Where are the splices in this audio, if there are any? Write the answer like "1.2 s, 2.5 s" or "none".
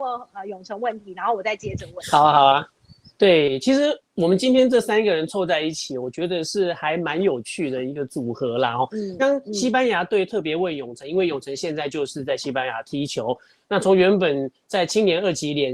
9.2 s